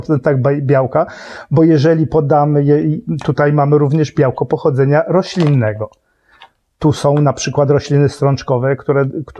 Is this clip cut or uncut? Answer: uncut